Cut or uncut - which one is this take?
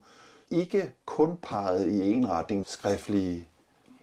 cut